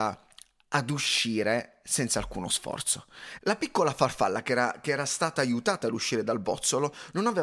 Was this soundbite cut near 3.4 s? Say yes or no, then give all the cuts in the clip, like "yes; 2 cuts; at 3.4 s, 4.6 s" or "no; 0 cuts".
yes; 1 cut; at 3.4 s